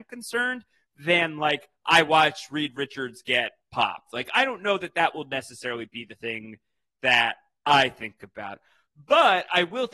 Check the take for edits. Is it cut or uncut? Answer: uncut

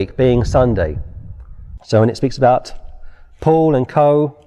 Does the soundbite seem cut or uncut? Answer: cut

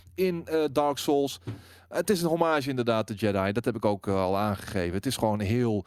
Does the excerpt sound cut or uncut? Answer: uncut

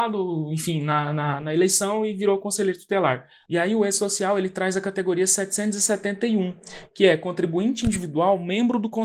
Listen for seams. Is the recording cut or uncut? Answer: cut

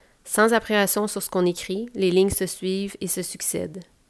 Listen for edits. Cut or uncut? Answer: uncut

